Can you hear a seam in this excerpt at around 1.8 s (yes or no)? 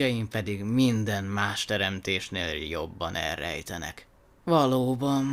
no